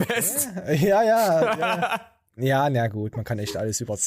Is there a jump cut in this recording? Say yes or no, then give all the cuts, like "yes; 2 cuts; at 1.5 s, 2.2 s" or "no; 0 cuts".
no; 0 cuts